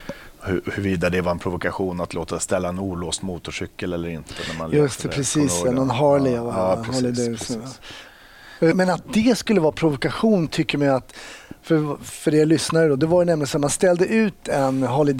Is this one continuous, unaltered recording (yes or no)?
no